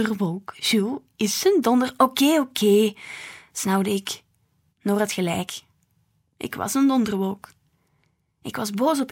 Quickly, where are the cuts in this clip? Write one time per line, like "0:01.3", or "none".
0:04.7